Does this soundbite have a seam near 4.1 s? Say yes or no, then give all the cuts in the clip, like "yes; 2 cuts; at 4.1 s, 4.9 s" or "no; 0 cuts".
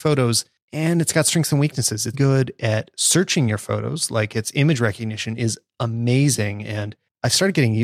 no; 1 cut; at 2.1 s